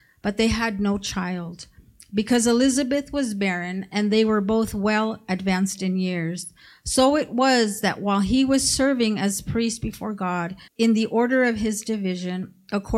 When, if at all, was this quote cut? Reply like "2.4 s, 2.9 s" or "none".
10.7 s